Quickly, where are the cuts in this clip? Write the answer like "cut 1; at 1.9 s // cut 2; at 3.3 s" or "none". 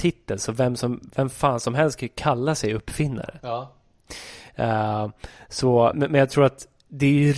cut 1; at 5.9 s